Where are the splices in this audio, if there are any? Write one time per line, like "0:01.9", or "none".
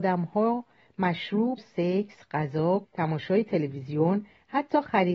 0:01.6
0:02.8